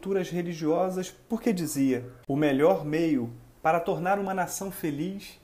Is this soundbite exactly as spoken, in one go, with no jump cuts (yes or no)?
no